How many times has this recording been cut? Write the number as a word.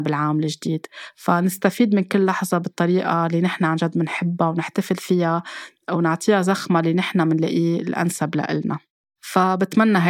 zero